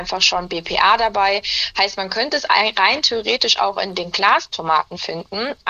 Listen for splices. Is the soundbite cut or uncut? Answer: uncut